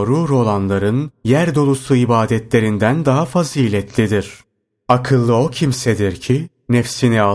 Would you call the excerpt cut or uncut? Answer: uncut